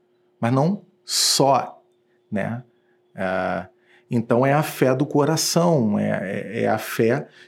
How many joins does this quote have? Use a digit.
0